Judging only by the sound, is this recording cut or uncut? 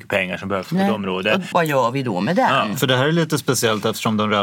cut